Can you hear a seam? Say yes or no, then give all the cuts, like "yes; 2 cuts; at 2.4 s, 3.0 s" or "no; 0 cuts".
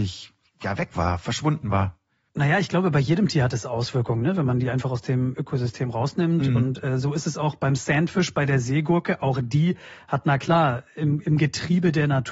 no; 0 cuts